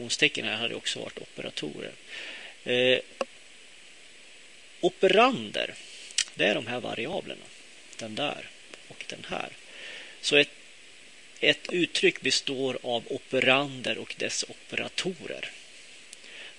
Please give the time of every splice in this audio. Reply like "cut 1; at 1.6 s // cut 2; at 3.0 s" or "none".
none